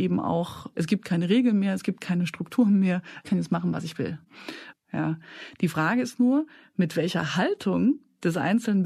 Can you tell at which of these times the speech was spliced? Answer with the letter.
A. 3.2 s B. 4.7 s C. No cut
B